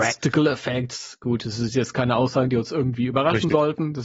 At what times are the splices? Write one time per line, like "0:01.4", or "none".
none